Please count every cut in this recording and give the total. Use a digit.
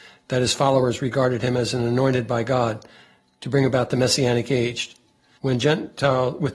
1